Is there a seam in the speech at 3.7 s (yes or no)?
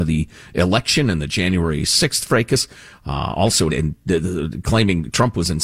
yes